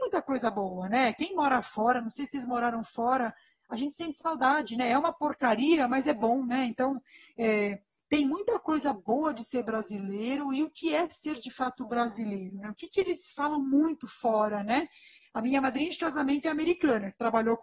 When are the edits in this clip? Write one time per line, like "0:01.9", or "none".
none